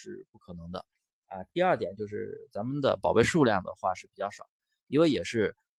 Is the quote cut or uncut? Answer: uncut